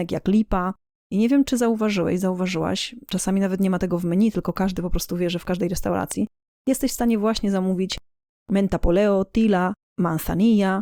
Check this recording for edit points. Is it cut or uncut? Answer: uncut